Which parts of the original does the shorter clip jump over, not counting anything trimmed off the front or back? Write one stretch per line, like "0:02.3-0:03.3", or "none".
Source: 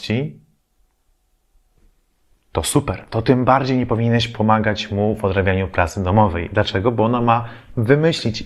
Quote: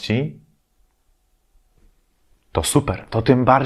none